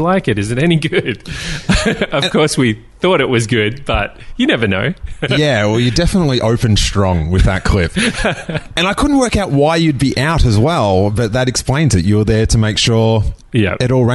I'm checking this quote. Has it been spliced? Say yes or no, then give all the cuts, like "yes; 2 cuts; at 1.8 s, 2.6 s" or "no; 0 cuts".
no; 0 cuts